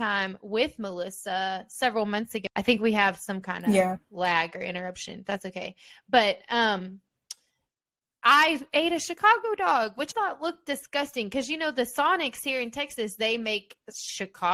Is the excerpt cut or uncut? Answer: cut